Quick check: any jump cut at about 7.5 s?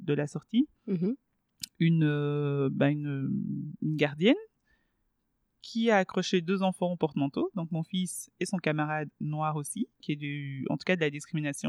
no; 1 cut; at 10.0 s

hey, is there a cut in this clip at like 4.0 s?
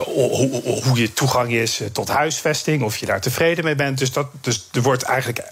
no; 0 cuts

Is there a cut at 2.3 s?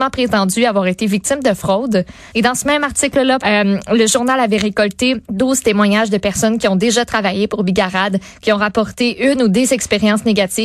yes; 3 cuts; at 2.3 s, 3.4 s, 5.2 s

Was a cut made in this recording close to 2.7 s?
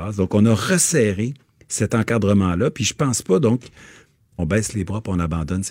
no; 1 cut; at 4.4 s

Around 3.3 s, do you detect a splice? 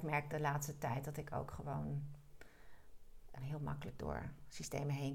yes; 1 cut; at 3.3 s

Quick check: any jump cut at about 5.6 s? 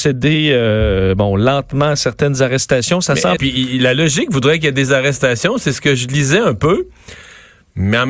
no; 1 cut; at 3.4 s

